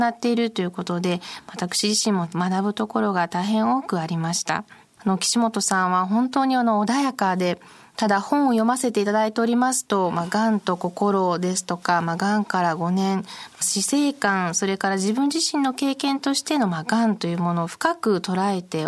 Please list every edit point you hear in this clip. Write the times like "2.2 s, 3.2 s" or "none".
5.0 s, 13.6 s